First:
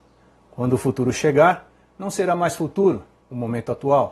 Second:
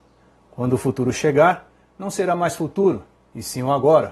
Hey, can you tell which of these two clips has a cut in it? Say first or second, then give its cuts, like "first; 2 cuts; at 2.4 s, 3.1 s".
first; 1 cut; at 3.2 s